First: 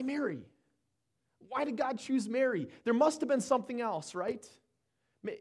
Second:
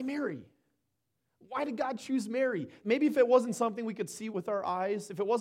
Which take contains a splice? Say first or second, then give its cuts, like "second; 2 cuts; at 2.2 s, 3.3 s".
second; 2 cuts; at 2.8 s, 4.3 s